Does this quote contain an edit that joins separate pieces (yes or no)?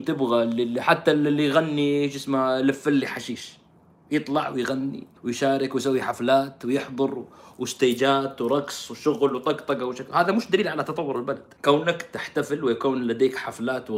yes